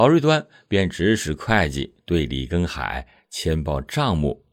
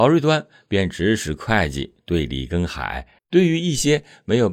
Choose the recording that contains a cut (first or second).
second